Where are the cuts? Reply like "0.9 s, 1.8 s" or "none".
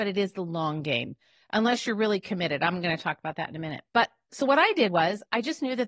3.9 s